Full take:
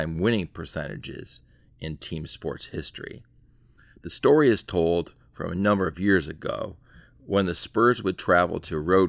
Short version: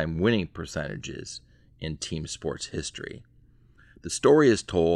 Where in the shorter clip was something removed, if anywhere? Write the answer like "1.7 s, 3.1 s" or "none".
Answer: none